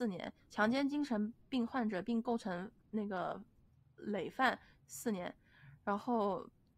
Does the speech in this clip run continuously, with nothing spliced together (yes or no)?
yes